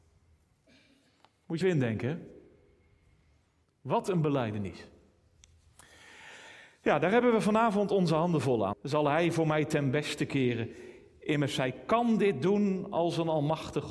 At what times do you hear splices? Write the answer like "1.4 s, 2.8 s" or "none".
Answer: 1.6 s, 8.7 s